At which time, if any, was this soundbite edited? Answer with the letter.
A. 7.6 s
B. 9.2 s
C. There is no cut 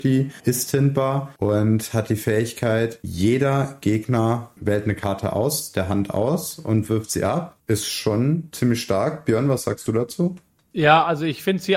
A